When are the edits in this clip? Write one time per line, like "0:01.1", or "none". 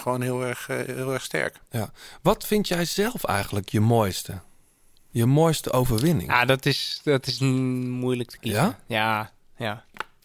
none